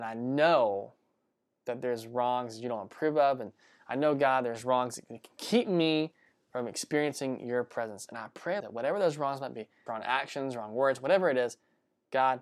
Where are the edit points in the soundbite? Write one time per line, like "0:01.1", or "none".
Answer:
0:08.6
0:09.9